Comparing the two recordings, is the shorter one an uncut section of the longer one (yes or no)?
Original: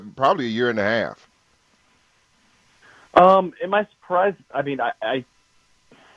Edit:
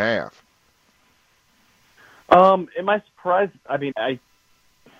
no